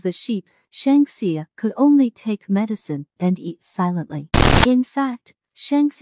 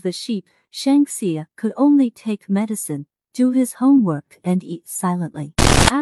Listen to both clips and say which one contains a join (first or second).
first